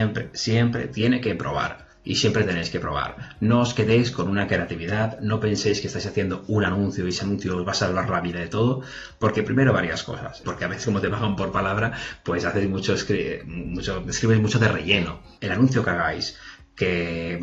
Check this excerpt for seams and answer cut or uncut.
cut